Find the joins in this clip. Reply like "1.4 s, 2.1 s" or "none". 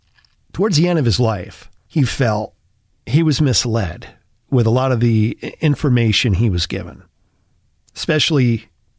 1.8 s